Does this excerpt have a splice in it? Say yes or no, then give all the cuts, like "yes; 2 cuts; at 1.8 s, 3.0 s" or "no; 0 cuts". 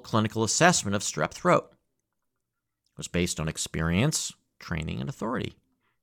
no; 0 cuts